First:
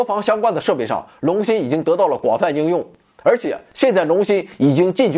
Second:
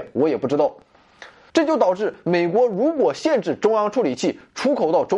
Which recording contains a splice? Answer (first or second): second